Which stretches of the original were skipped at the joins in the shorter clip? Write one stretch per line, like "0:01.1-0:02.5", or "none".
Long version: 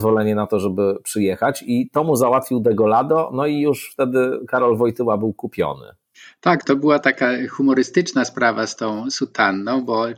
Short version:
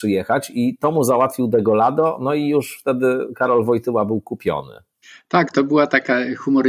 none